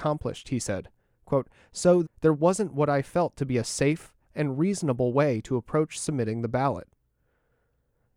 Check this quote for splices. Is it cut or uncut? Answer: cut